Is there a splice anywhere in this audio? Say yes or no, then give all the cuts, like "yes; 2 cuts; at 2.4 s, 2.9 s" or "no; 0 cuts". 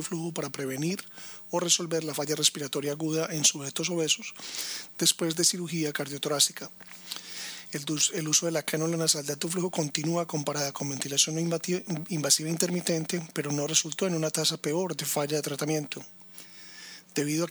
no; 0 cuts